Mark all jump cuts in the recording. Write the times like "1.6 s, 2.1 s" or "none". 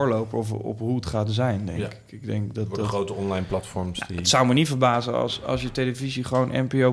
none